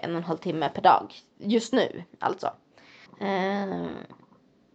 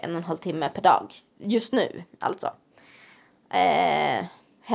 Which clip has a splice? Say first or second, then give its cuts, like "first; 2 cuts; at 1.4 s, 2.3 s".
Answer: first; 1 cut; at 3.1 s